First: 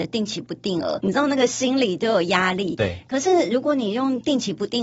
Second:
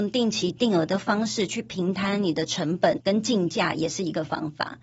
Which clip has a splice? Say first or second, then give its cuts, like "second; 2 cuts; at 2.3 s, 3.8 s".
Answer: first; 1 cut; at 1.0 s